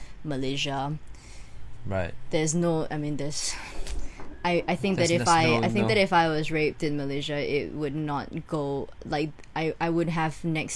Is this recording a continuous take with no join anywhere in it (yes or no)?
yes